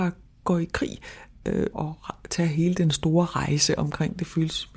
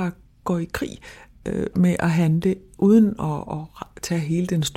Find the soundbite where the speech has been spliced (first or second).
first